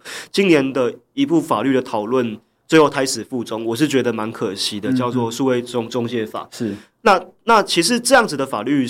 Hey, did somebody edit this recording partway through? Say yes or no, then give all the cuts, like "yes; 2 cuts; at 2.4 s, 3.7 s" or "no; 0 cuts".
no; 0 cuts